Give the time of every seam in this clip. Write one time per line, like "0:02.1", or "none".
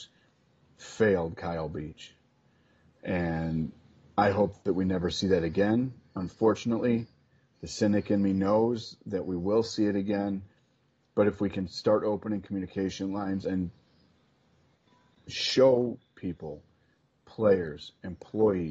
none

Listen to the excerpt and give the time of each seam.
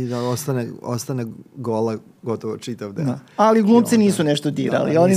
none

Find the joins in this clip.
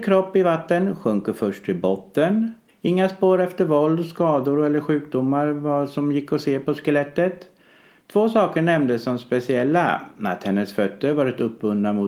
0:02.7

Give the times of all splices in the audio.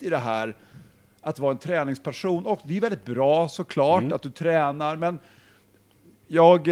none

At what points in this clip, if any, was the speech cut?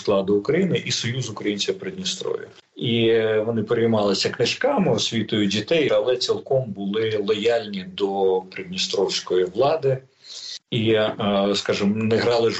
0:02.6
0:05.9

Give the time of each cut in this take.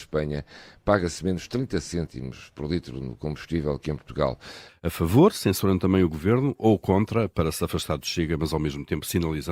0:04.7

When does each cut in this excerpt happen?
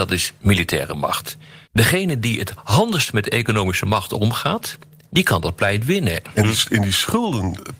0:01.6
0:05.0
0:06.2

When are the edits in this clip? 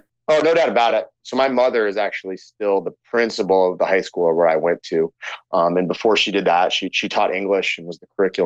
0:01.2

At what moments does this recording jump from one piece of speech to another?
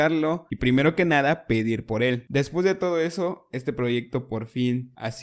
none

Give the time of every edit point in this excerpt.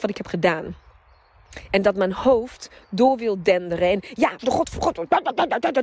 0:04.4

